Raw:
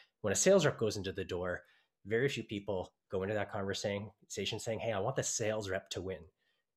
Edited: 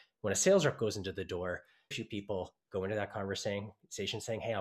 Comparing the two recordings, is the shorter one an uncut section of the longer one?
no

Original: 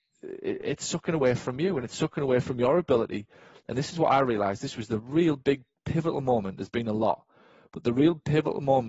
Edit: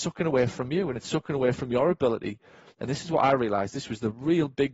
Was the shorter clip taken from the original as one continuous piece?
yes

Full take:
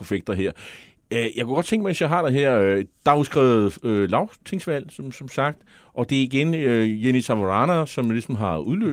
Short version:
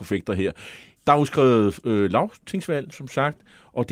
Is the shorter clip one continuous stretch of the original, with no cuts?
no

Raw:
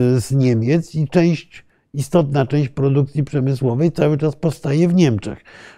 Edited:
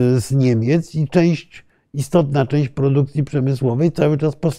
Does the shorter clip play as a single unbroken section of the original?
yes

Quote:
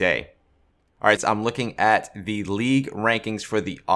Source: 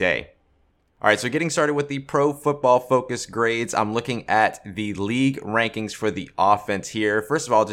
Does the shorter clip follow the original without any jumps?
no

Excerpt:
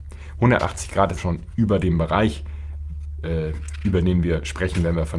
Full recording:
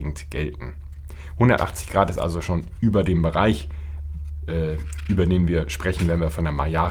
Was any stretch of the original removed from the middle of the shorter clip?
yes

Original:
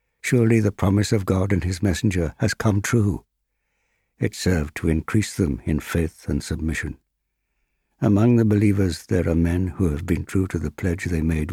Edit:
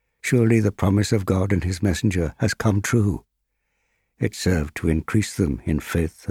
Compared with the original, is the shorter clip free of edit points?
yes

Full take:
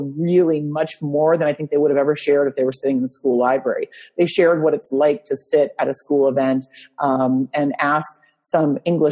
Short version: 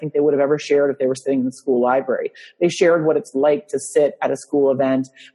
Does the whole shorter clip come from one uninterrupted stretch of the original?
yes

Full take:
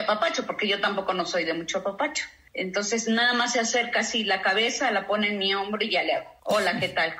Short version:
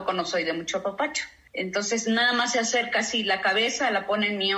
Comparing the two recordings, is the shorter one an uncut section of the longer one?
yes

